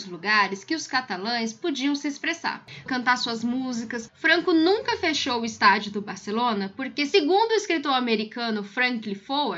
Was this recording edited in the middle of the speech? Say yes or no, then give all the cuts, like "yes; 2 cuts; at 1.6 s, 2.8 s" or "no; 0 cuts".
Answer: yes; 1 cut; at 2.9 s